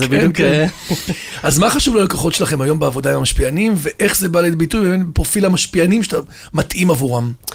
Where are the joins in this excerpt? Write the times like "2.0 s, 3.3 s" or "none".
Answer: none